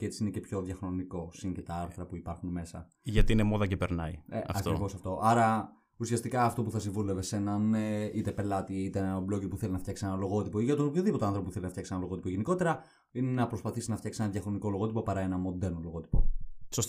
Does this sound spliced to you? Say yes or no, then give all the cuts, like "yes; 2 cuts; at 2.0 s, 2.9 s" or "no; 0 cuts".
no; 0 cuts